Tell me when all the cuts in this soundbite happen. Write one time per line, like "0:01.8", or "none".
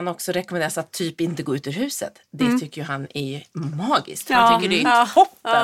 none